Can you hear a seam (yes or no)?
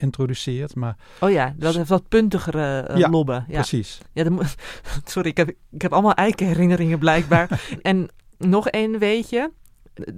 no